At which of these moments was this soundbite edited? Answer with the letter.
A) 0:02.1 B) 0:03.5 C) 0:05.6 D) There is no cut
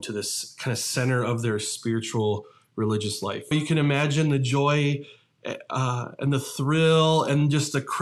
B